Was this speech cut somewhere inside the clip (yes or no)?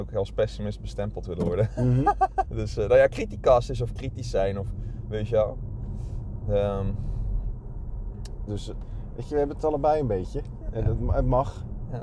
yes